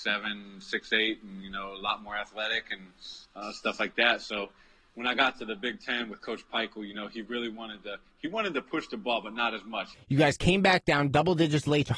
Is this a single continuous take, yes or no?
no